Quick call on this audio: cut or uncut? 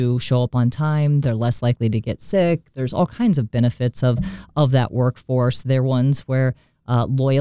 uncut